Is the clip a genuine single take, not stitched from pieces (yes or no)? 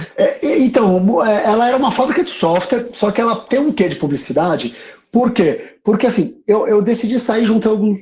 yes